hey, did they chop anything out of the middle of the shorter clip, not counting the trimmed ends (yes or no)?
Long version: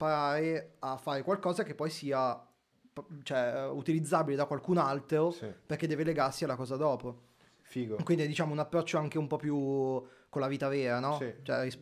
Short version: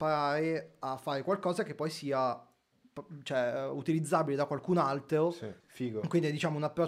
yes